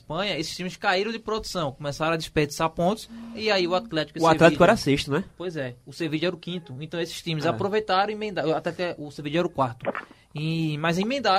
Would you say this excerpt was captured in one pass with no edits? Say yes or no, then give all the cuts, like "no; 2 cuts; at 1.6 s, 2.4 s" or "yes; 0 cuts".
yes; 0 cuts